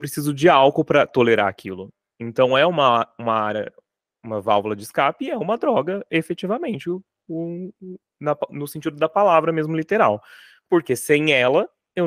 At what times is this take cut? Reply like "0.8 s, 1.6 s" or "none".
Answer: none